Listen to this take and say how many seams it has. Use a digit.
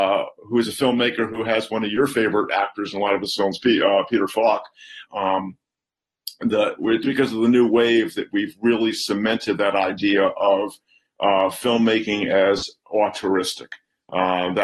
2